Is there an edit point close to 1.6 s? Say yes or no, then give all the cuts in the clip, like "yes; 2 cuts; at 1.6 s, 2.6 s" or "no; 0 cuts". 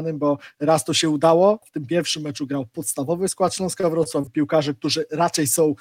yes; 2 cuts; at 1.6 s, 4.3 s